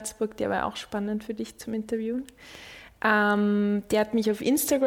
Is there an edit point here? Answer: no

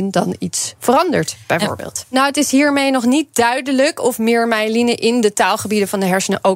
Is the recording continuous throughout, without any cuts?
no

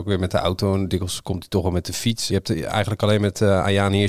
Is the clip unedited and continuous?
no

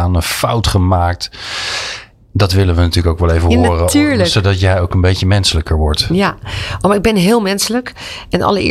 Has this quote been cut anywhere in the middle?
no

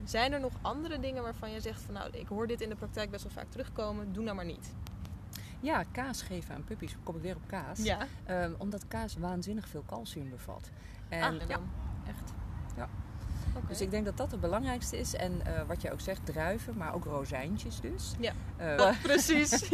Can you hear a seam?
yes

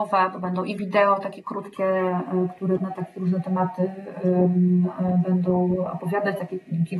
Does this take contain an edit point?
yes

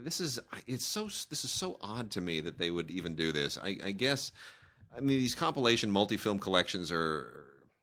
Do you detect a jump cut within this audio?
no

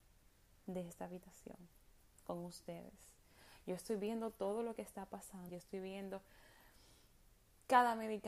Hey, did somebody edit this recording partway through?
yes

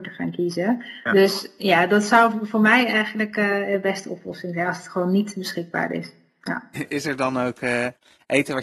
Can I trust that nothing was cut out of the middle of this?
no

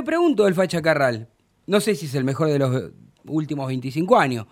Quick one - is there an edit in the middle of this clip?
no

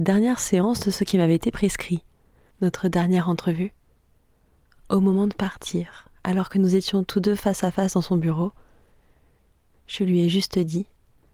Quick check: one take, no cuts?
yes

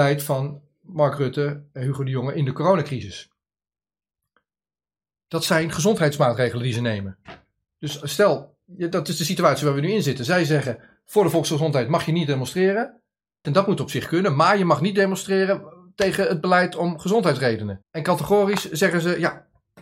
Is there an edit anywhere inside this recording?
yes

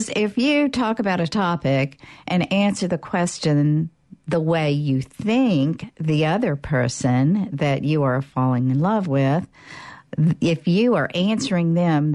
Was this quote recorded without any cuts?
yes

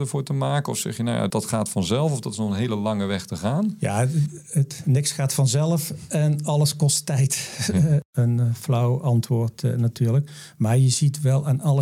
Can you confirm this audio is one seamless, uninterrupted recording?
no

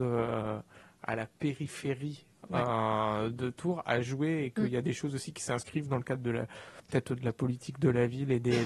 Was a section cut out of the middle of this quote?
no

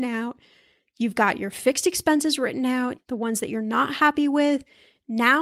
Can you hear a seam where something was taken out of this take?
yes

